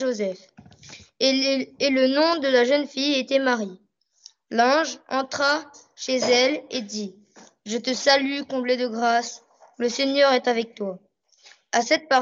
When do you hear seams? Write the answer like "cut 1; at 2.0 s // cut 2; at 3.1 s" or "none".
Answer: none